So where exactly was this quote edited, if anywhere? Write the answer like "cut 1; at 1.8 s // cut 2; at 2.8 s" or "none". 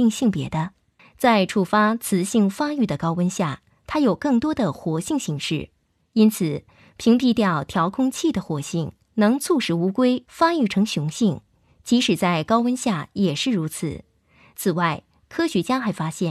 cut 1; at 1.0 s